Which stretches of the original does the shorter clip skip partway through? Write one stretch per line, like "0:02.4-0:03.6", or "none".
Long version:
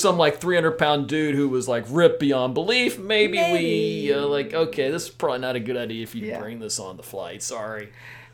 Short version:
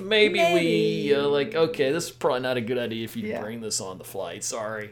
none